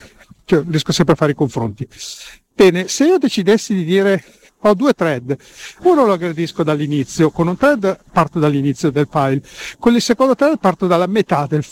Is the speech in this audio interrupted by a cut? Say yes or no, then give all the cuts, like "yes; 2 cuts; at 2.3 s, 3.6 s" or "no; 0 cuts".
yes; 1 cut; at 5.8 s